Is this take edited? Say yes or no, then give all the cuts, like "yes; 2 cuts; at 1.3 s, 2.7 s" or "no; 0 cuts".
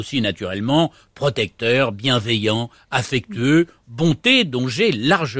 no; 0 cuts